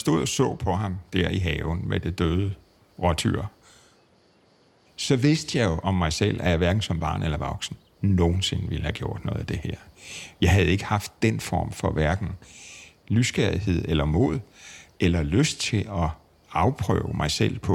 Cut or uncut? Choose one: uncut